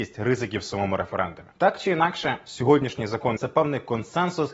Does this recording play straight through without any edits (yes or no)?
no